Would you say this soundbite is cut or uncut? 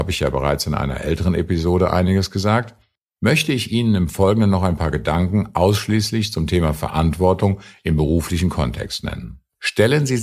uncut